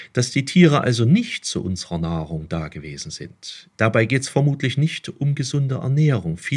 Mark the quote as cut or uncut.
cut